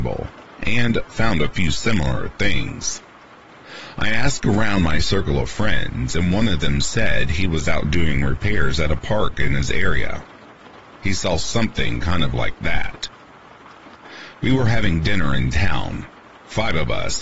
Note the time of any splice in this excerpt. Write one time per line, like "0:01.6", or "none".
none